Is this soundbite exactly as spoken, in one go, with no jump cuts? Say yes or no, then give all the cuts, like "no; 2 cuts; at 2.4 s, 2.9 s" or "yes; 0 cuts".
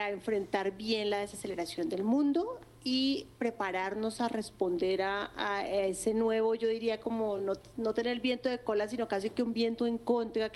yes; 0 cuts